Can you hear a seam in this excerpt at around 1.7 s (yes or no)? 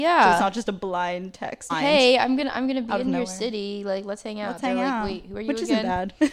yes